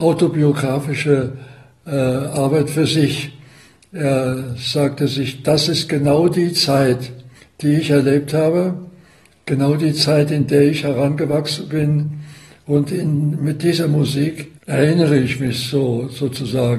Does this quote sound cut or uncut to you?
cut